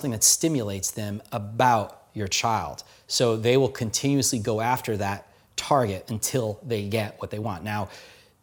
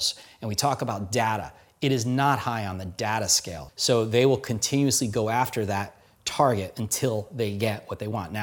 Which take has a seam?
second; 1 cut; at 3.7 s

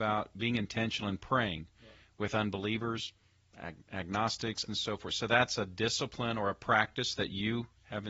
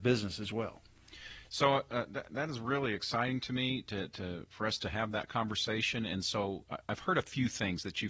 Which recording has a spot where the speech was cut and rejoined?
first; 1 cut; at 4.7 s

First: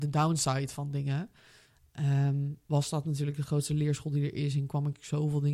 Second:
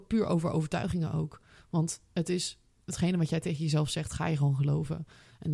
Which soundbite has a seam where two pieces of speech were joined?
first; 1 cut; at 2.7 s

